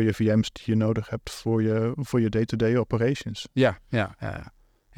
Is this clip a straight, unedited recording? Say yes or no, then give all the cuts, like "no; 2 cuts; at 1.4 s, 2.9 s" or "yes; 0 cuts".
yes; 0 cuts